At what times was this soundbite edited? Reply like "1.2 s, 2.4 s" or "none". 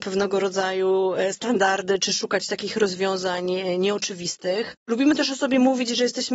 none